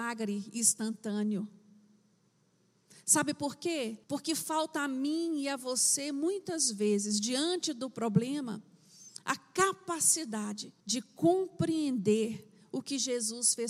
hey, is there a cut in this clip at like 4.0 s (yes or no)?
yes